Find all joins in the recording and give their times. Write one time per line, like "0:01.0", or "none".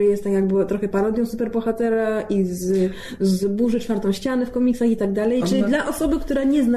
none